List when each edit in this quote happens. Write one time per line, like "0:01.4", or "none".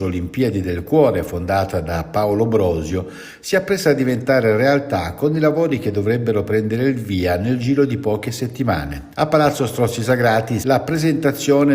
0:09.1
0:10.6